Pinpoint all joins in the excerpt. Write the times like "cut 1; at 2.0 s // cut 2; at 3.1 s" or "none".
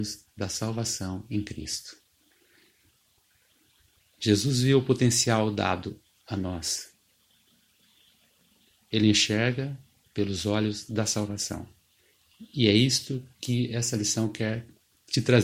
cut 1; at 4.0 s